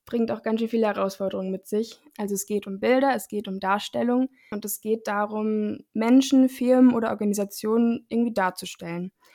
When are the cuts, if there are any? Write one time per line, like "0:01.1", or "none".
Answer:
0:02.1